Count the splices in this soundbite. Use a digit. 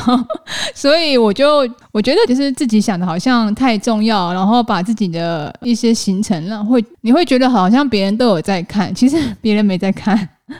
1